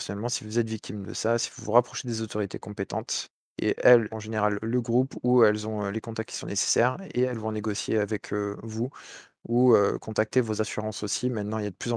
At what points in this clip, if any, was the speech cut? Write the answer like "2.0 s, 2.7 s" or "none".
4.1 s